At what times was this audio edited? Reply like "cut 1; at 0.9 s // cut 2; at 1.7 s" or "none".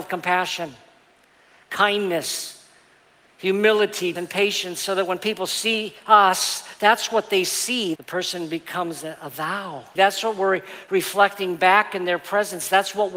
cut 1; at 4.2 s // cut 2; at 8.0 s // cut 3; at 9.9 s